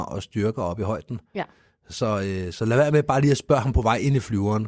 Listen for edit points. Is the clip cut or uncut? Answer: uncut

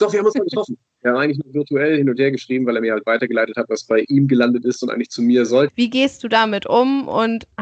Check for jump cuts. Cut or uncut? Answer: cut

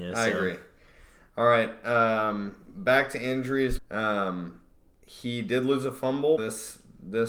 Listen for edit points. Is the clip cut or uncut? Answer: cut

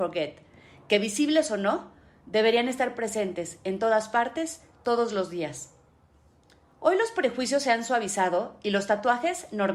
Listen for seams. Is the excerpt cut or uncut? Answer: uncut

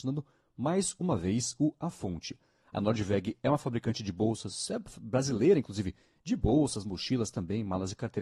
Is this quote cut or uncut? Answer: uncut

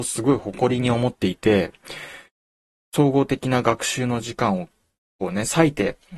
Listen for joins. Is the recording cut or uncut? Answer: uncut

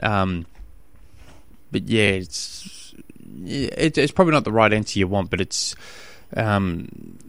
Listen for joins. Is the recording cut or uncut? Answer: uncut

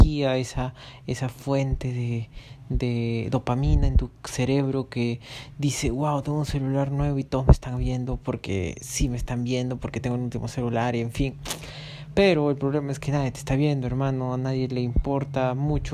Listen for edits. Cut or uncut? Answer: uncut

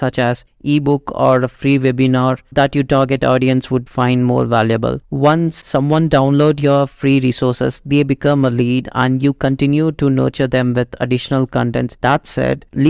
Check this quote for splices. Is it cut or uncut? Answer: uncut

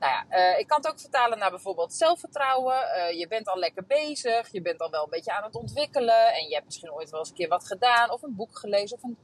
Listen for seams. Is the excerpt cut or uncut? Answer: uncut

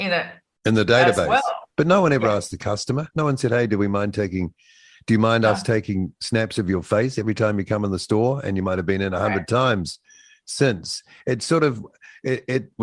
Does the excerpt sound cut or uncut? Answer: cut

